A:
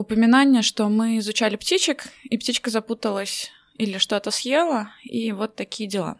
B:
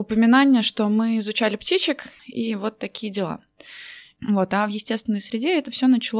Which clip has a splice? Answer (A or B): B